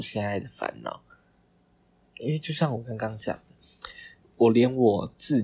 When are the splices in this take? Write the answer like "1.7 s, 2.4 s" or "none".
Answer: none